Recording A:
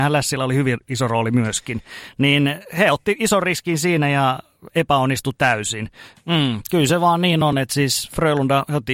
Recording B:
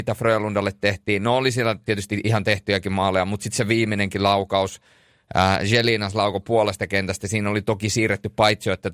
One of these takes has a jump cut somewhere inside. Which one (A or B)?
A